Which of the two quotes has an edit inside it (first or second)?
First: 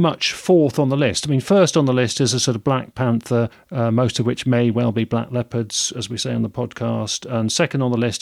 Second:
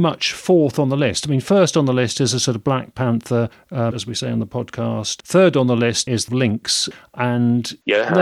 second